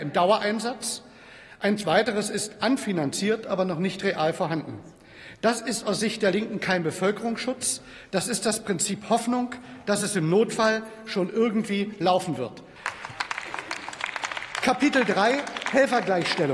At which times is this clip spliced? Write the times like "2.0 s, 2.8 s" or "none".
12.8 s

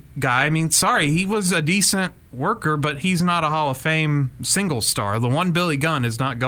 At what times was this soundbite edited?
none

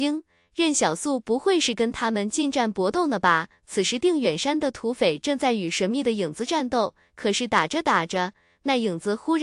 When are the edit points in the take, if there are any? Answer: none

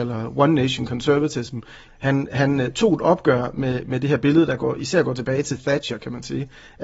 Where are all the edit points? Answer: 1.9 s

